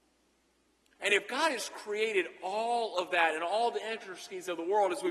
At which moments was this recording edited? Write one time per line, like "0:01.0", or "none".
0:01.0